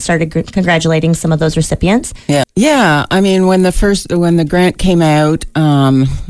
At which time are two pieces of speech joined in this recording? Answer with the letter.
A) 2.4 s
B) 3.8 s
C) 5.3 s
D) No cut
A